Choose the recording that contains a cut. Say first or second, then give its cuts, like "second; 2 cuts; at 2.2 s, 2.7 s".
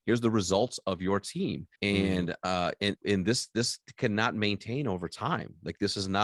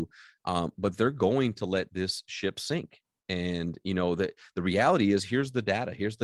first; 2 cuts; at 1.8 s, 3.0 s